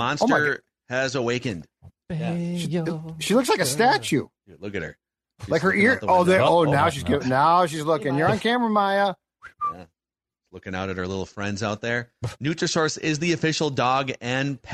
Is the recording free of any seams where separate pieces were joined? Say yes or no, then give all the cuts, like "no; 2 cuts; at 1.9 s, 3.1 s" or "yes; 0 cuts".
yes; 0 cuts